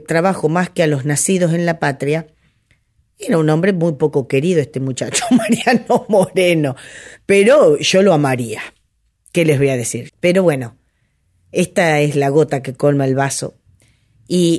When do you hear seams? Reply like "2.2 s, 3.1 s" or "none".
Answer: 10.1 s